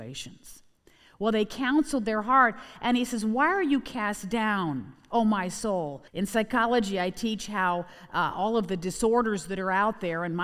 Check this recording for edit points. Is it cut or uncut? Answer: cut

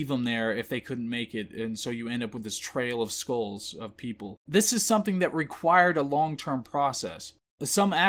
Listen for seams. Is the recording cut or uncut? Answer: cut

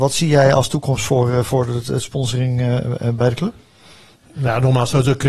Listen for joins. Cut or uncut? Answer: uncut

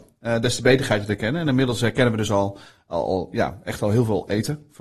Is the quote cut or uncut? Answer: uncut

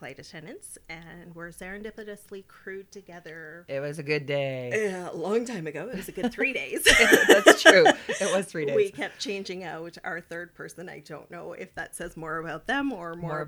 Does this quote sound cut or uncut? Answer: uncut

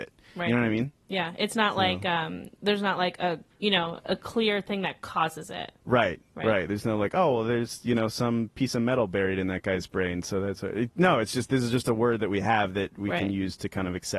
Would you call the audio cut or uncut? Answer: uncut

